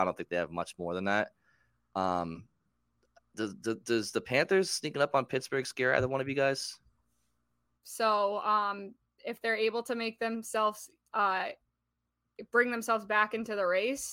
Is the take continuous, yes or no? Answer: no